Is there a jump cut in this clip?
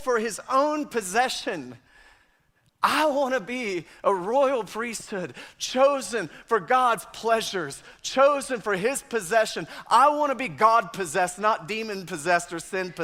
no; 0 cuts

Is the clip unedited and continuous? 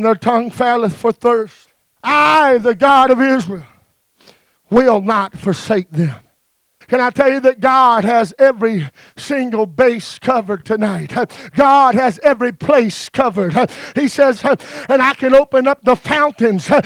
no; 3 cuts; at 2.0 s, 6.8 s, 14.4 s

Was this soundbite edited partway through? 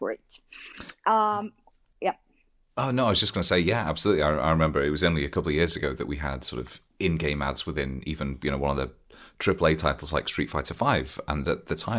no; 0 cuts

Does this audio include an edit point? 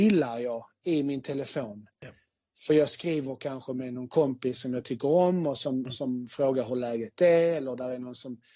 no; 0 cuts

